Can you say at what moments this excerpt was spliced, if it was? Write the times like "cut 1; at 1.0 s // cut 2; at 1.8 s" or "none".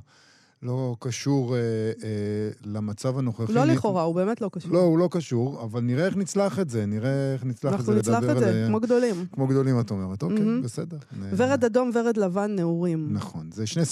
none